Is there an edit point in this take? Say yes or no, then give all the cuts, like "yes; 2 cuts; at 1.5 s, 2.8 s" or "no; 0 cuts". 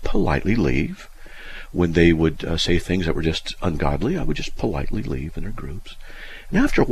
no; 0 cuts